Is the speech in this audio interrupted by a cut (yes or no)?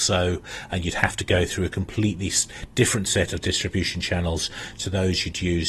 no